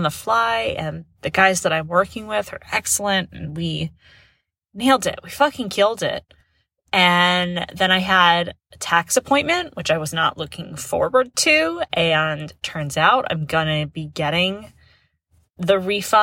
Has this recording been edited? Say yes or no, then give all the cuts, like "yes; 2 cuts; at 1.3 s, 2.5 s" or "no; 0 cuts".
no; 0 cuts